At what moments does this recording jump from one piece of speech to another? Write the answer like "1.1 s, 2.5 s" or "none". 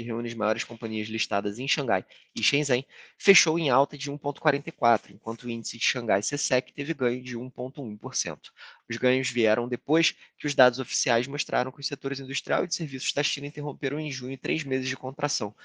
8.8 s